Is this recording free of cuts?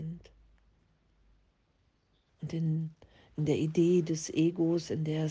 no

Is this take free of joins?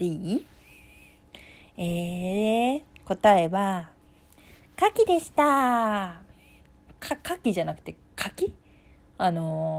yes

